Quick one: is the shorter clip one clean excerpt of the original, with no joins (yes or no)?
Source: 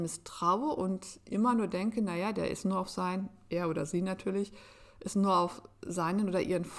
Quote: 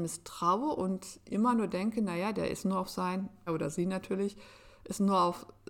no